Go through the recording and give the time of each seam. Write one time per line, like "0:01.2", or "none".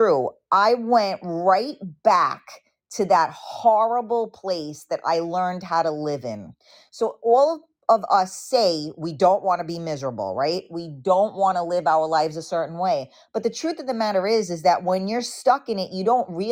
none